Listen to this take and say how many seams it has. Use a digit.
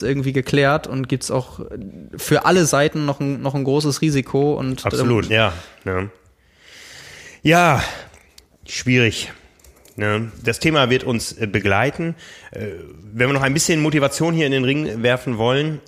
1